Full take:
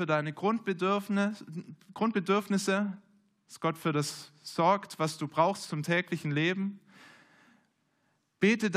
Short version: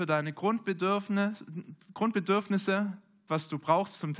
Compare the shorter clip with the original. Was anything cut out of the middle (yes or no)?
yes